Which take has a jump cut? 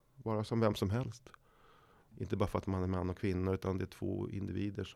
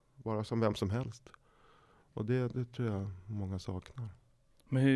first; 1 cut; at 2.1 s

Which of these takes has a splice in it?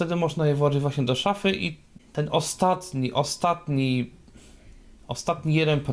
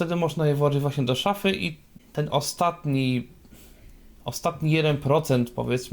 second; 1 cut; at 2.3 s

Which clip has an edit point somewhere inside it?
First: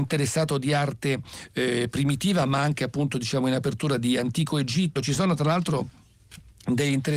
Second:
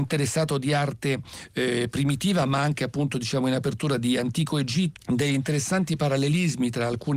second; 1 cut; at 5.0 s

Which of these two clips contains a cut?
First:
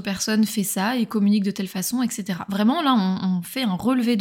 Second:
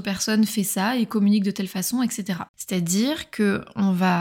second; 1 cut; at 2.5 s

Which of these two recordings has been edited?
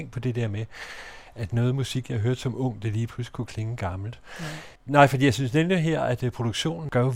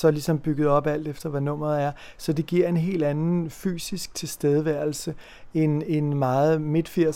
first; 1 cut; at 4.8 s

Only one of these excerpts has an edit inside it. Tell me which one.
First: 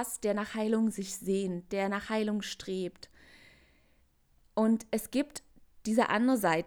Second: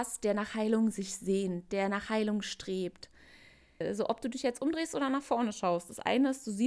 second; 1 cut; at 3.8 s

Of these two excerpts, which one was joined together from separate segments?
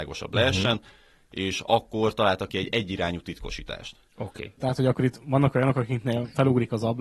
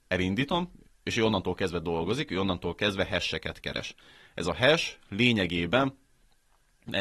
first; 1 cut; at 4.1 s

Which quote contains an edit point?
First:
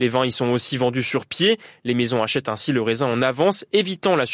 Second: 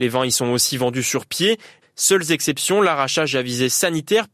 second; 1 cut; at 1.8 s

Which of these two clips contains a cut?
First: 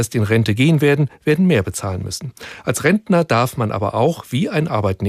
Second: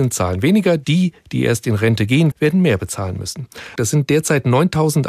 second; 2 cuts; at 2.3 s, 3.8 s

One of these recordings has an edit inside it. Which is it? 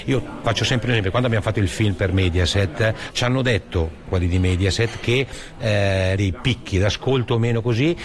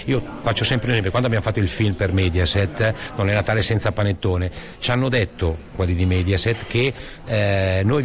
first; 2 cuts; at 3.1 s, 6.2 s

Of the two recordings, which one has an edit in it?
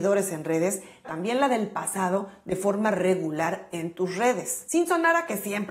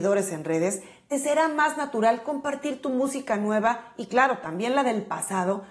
first; 1 cut; at 1.0 s

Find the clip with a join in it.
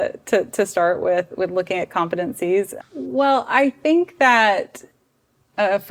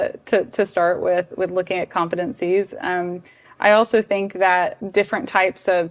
first; 1 cut; at 2.8 s

